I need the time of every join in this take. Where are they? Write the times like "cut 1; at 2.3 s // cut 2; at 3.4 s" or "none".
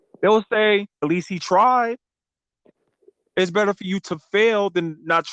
cut 1; at 1.0 s